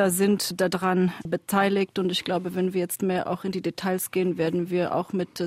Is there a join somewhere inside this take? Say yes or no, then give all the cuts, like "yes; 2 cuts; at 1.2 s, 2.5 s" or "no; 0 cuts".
no; 0 cuts